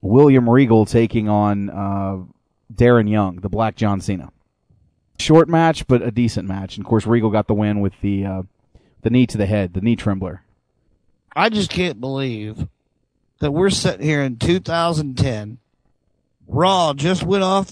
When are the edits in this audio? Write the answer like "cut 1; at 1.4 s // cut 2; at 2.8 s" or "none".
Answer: cut 1; at 5.2 s

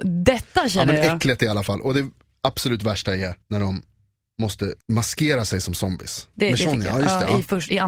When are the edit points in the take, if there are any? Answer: cut 1; at 3.4 s // cut 2; at 4.8 s // cut 3; at 6.3 s

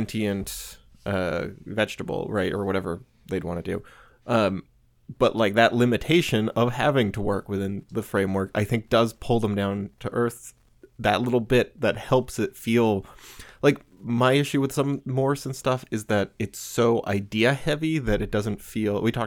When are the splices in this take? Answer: none

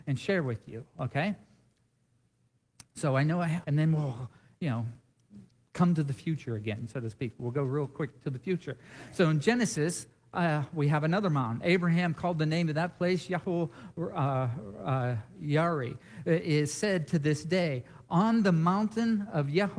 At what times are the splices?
cut 1; at 3.6 s

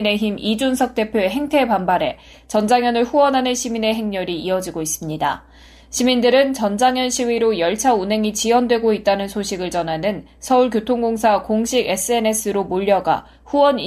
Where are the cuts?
none

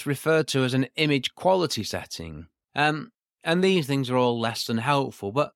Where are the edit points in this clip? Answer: cut 1; at 2.6 s

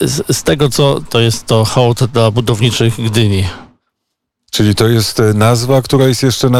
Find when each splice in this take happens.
cut 1; at 1.1 s

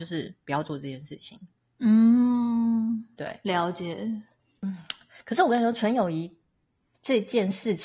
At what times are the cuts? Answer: none

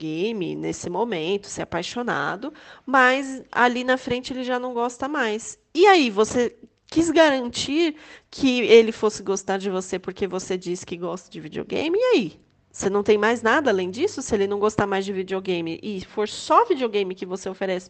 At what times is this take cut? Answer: none

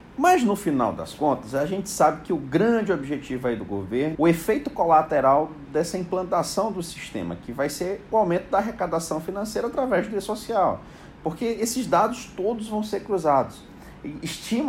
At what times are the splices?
cut 1; at 4.1 s

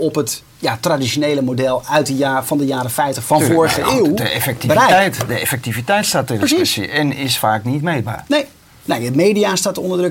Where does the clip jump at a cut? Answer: none

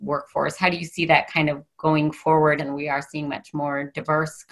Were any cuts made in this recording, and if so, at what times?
cut 1; at 2.6 s

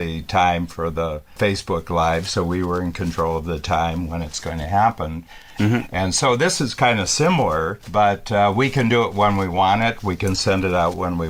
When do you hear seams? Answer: cut 1; at 5.6 s

